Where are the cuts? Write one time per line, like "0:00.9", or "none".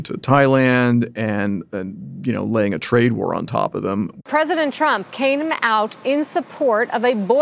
none